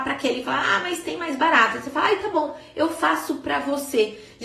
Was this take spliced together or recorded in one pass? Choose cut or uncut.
uncut